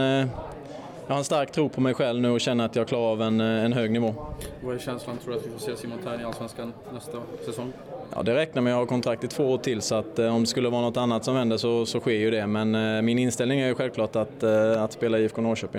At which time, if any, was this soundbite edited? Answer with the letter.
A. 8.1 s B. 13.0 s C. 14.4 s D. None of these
D